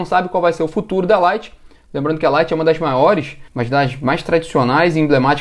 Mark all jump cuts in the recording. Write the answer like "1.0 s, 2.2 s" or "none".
3.5 s